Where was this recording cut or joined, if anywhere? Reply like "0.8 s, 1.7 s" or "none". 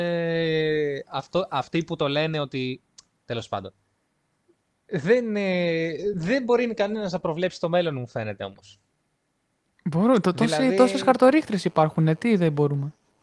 none